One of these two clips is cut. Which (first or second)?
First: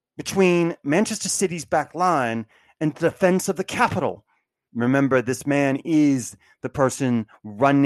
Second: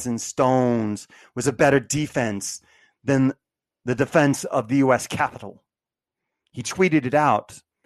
first